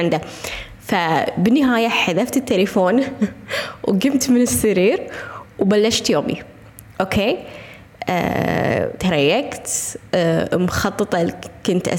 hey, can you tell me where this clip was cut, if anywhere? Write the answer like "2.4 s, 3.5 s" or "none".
none